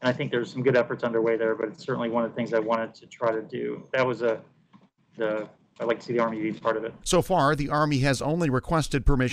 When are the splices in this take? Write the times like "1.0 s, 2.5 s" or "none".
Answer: 5.2 s, 7.0 s